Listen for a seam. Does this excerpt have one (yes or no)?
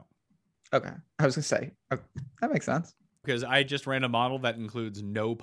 yes